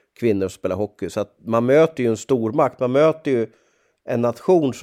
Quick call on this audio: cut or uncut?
uncut